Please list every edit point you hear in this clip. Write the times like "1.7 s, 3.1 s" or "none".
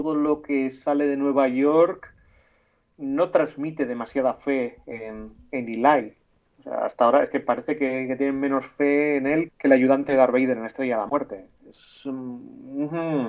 9.5 s